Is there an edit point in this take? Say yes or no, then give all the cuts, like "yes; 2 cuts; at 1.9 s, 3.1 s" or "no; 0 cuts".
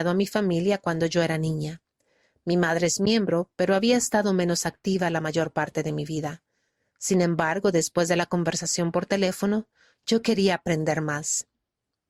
no; 0 cuts